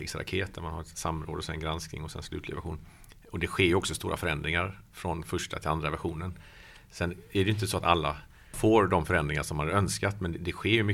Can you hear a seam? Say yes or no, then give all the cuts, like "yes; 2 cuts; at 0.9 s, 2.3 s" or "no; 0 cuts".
yes; 1 cut; at 4.8 s